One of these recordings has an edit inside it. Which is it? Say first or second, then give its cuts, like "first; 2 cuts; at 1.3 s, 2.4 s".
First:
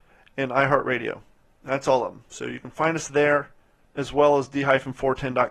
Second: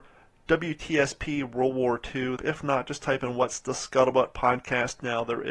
second; 1 cut; at 2.4 s